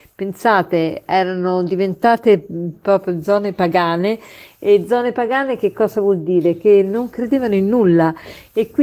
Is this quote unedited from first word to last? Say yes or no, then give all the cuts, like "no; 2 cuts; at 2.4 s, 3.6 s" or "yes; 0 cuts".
yes; 0 cuts